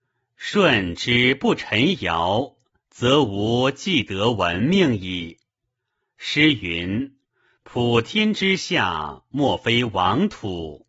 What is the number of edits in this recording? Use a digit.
0